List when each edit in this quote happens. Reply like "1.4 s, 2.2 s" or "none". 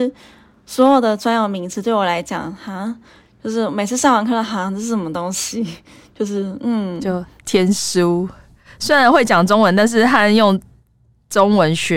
none